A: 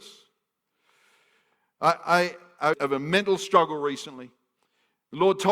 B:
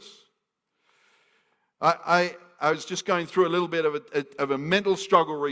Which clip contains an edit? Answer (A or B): A